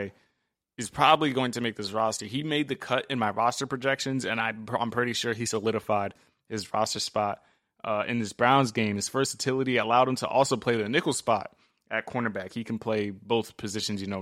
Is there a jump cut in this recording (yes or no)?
no